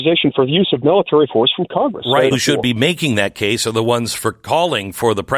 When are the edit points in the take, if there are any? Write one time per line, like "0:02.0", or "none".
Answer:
0:02.3